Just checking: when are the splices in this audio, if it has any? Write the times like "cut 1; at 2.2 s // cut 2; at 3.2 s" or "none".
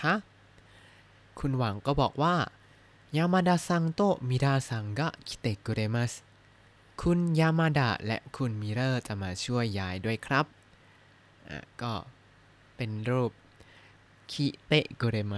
cut 1; at 6.9 s

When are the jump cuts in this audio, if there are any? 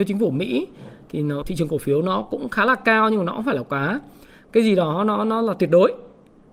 cut 1; at 1.4 s

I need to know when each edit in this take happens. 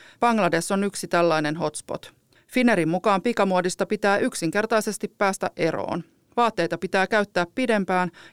cut 1; at 2.4 s

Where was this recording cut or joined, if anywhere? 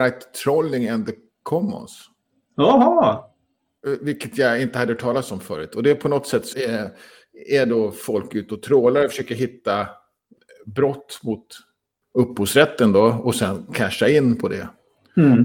cut 1; at 6.5 s

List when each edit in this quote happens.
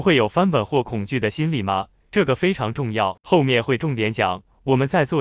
none

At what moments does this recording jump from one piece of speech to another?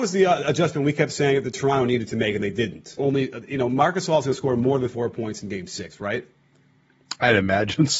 cut 1; at 3.0 s

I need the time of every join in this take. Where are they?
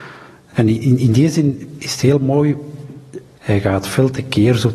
cut 1; at 1.8 s

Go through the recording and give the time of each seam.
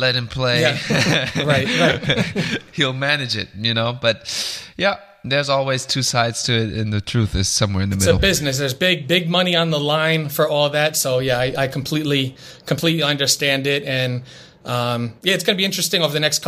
none

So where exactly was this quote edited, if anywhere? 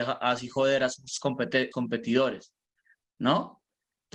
cut 1; at 1.7 s

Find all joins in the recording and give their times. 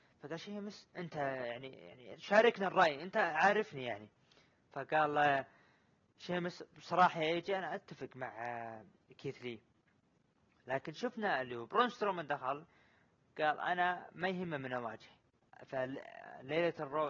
cut 1; at 0.9 s

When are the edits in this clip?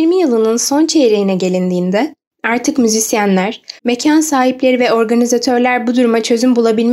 cut 1; at 3.8 s

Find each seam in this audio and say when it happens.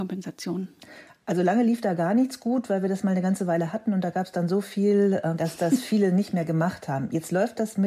cut 1; at 5.4 s

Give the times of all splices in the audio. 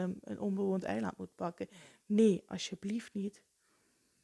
none

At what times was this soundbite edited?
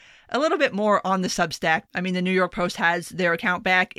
cut 1; at 1.9 s

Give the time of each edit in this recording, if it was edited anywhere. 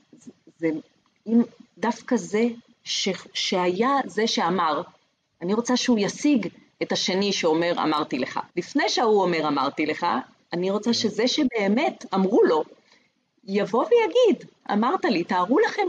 cut 1; at 8.5 s // cut 2; at 14.6 s

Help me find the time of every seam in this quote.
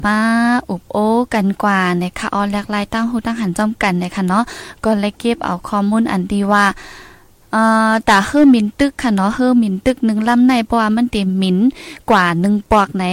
none

